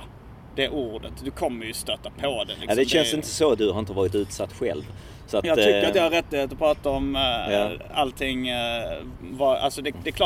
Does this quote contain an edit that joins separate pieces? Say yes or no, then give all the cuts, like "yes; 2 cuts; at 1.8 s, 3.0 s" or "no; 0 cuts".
yes; 1 cut; at 3.5 s